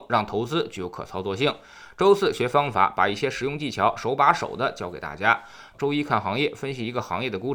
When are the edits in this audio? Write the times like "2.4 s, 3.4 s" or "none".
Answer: 5.7 s

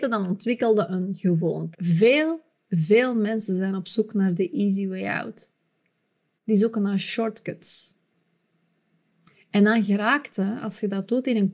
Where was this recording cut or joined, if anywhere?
1.7 s

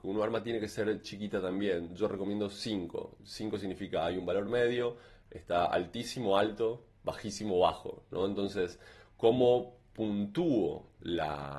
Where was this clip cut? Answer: none

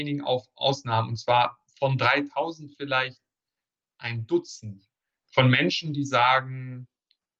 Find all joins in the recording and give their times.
5.2 s

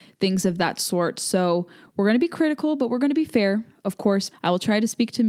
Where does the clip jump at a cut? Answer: 4.3 s

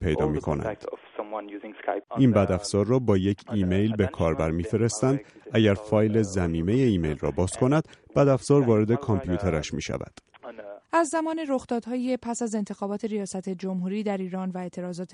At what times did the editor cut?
2.1 s, 10.8 s

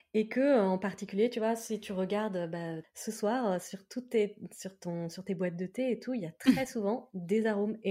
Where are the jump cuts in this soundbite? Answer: 2.8 s

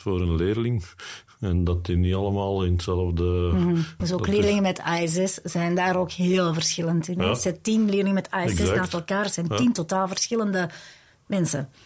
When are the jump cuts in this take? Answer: 4.0 s

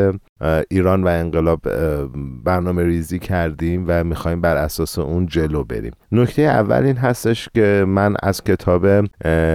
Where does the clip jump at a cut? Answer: 6.0 s

